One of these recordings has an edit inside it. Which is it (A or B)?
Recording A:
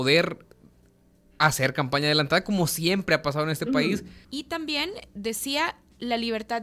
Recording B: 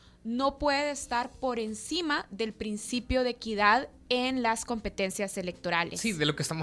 A